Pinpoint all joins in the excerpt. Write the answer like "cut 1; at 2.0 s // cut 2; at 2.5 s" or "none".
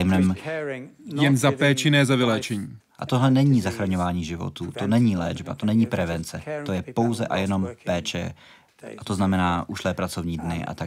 cut 1; at 2.8 s

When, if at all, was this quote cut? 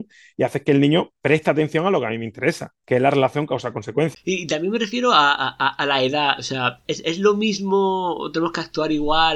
cut 1; at 4.1 s // cut 2; at 6.8 s

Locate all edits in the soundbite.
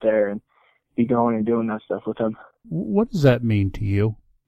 cut 1; at 2.6 s

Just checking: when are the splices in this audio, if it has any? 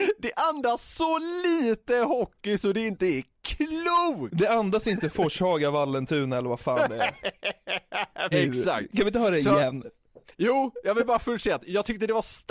cut 1; at 8.3 s

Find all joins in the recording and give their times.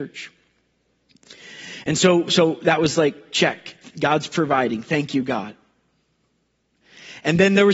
none

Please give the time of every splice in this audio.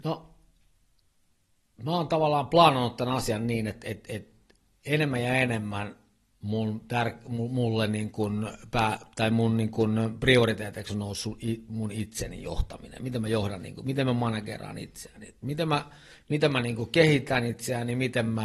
none

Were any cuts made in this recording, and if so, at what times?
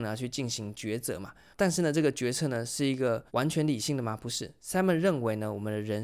cut 1; at 1.5 s // cut 2; at 3.3 s

